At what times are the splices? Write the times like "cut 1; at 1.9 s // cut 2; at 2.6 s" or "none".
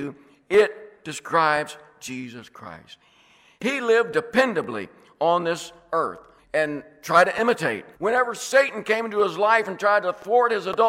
cut 1; at 6.4 s // cut 2; at 7.9 s